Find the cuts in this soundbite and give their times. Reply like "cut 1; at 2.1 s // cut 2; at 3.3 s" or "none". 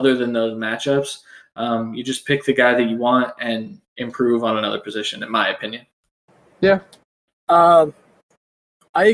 none

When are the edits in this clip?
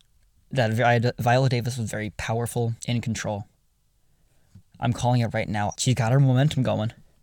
cut 1; at 2.8 s // cut 2; at 4.6 s // cut 3; at 5.7 s

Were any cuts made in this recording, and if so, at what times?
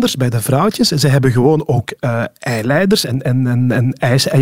none

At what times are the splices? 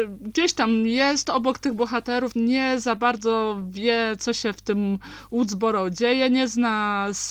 cut 1; at 2.3 s

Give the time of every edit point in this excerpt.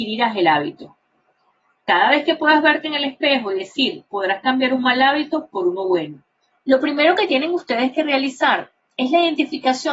cut 1; at 4.1 s // cut 2; at 6.5 s

